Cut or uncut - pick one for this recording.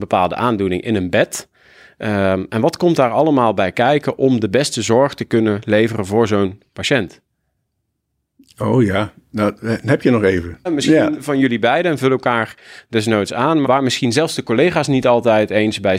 cut